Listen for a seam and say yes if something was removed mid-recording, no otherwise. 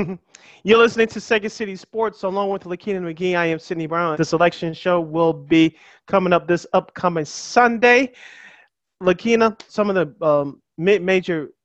yes